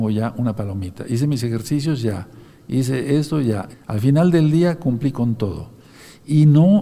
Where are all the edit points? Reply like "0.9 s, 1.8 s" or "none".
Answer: 3.7 s